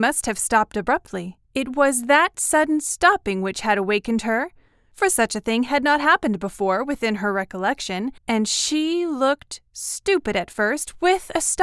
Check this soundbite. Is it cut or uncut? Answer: cut